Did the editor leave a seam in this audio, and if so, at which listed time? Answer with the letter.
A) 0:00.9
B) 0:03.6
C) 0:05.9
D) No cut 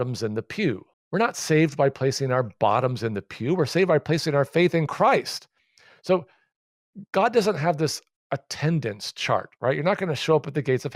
A